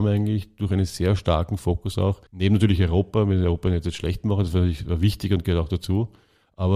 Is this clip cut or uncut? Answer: cut